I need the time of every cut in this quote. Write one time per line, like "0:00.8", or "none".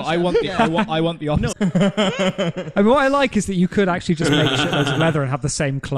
0:01.5